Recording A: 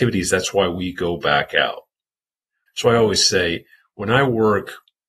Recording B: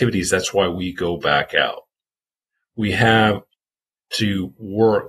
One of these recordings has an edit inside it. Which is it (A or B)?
A